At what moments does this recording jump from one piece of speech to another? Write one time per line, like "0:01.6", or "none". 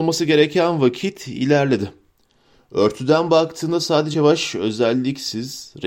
0:04.1